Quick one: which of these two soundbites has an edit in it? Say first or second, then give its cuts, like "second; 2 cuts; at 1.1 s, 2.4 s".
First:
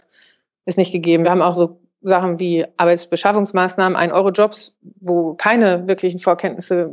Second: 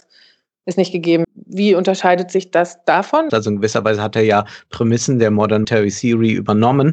second; 3 cuts; at 1.2 s, 3.3 s, 5.6 s